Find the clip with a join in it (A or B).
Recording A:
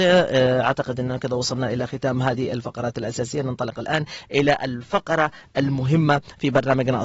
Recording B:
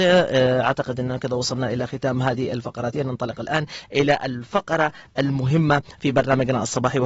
B